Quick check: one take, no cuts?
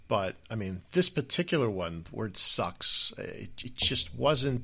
yes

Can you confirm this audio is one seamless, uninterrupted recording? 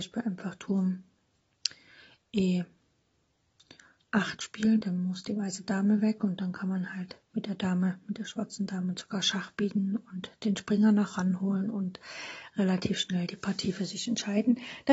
no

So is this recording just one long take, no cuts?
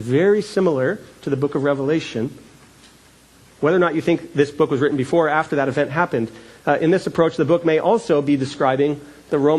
yes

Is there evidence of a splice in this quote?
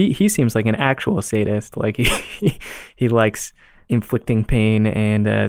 no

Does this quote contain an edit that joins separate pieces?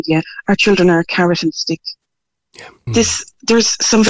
yes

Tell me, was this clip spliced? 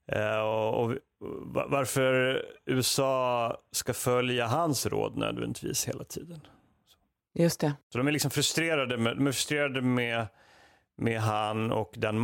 no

